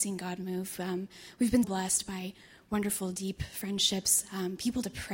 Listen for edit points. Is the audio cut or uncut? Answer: cut